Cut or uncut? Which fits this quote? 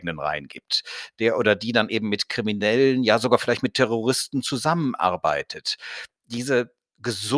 uncut